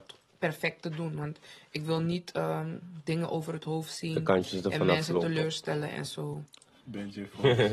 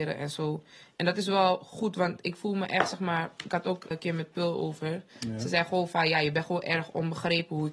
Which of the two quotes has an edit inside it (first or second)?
second